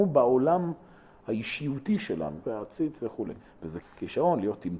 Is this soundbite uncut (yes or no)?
no